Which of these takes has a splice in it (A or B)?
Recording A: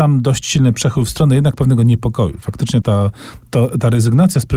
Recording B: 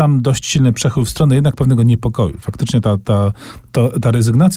A